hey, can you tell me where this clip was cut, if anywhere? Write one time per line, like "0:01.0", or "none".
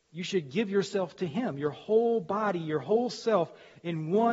none